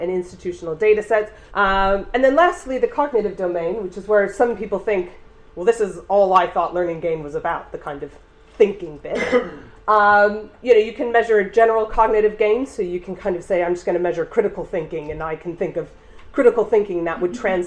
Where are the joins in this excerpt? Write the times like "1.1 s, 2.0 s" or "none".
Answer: 1.5 s